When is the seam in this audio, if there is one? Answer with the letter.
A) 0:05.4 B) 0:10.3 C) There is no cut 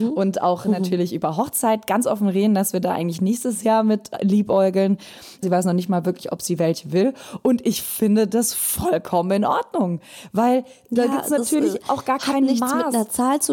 A